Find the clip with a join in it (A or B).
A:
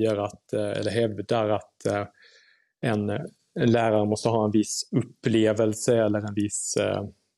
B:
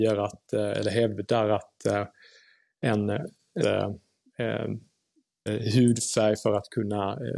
B